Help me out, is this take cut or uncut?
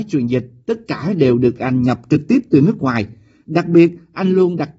uncut